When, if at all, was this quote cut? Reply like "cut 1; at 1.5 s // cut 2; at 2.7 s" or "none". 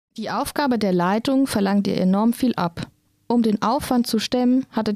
none